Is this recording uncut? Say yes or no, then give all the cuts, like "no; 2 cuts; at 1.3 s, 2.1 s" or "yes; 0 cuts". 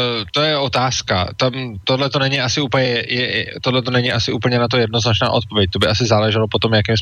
yes; 0 cuts